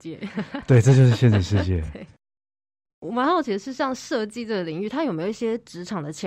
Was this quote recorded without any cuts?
yes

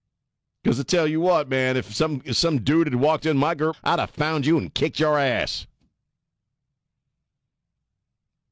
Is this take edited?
yes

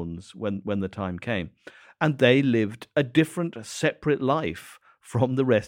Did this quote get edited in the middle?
no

